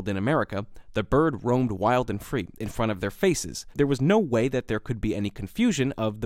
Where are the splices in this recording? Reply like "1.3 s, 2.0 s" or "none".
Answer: 3.7 s

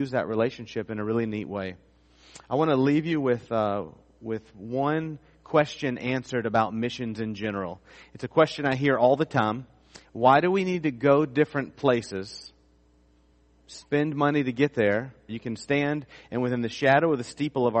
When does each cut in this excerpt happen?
10.0 s, 15.3 s

